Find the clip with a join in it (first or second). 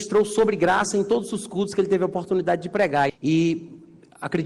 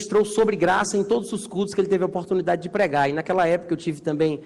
first